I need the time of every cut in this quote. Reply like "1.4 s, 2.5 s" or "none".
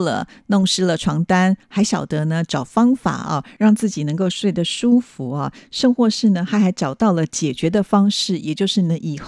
none